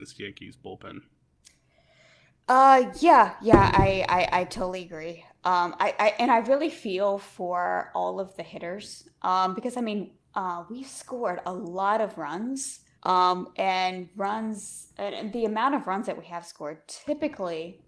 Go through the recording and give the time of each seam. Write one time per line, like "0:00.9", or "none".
0:12.9